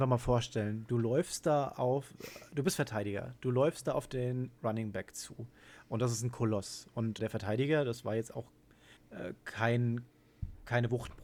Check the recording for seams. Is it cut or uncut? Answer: cut